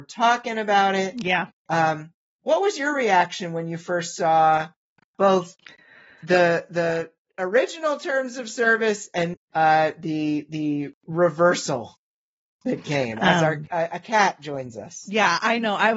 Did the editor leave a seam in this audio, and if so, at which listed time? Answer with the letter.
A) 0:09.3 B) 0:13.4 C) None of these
A